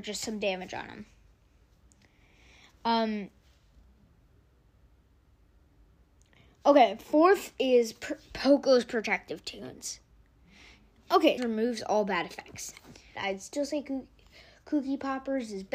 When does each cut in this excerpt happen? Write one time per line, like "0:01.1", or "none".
0:11.4
0:13.2